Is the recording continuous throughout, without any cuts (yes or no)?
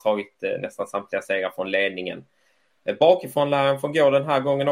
yes